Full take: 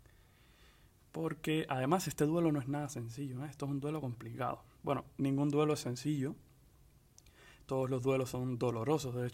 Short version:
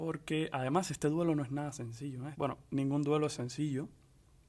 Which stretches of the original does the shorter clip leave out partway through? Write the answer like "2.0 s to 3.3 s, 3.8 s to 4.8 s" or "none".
3.5 s to 4.8 s